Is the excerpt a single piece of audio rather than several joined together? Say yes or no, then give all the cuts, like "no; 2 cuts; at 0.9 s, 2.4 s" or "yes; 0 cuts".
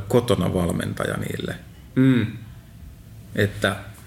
yes; 0 cuts